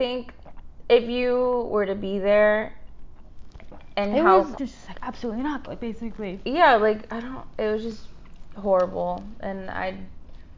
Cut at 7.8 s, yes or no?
no